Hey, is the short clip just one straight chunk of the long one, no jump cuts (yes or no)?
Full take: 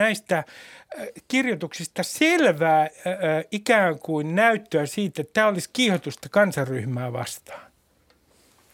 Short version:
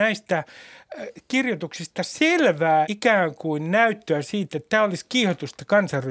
no